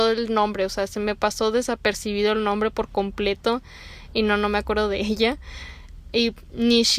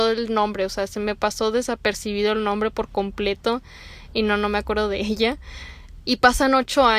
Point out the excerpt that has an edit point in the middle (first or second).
second